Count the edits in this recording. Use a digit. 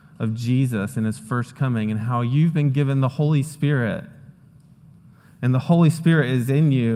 0